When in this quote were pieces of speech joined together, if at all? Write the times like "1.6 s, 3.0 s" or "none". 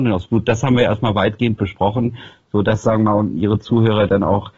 none